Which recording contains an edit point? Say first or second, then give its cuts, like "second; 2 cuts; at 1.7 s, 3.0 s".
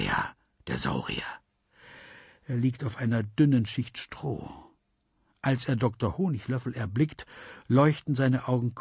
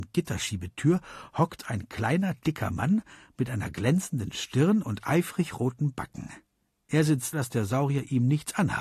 second; 1 cut; at 7.3 s